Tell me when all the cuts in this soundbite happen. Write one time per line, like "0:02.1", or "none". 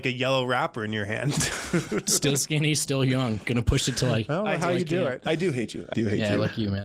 0:05.9